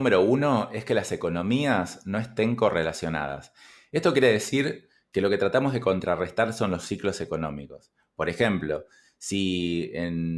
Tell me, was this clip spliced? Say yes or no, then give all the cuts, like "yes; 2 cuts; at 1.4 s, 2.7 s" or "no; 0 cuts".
no; 0 cuts